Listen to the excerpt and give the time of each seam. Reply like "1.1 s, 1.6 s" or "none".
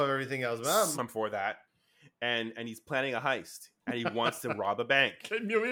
0.9 s, 3.8 s